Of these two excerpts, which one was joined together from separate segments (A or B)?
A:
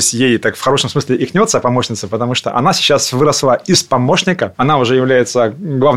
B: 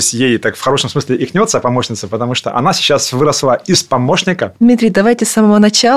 B